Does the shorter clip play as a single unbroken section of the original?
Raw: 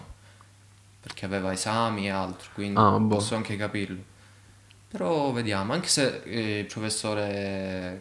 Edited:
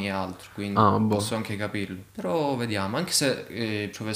no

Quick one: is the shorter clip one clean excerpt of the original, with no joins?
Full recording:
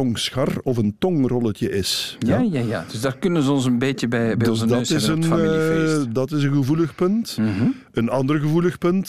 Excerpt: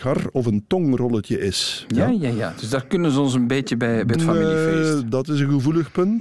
no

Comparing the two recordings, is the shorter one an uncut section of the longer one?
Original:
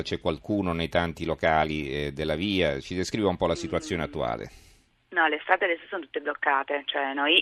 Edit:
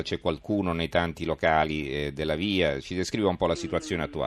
yes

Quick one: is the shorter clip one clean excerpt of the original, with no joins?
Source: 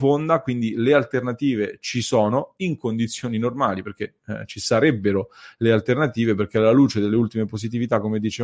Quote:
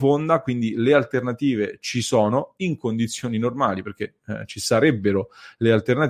yes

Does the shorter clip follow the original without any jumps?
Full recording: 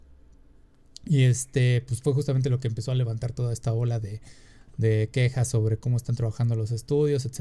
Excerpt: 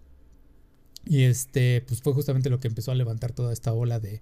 yes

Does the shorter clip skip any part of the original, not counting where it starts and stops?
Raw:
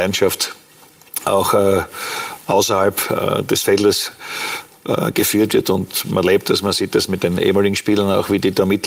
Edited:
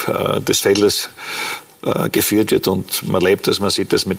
no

